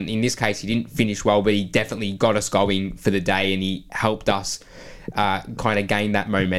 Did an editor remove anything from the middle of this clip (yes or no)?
no